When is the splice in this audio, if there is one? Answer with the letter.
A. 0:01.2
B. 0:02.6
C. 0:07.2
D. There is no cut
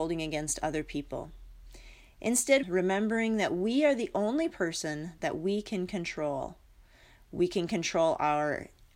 B